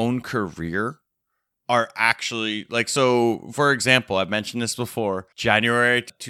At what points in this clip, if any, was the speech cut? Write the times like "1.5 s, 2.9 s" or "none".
5.3 s